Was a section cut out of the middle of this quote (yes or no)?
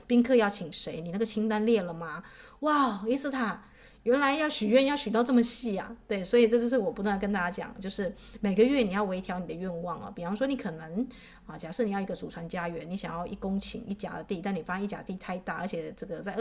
no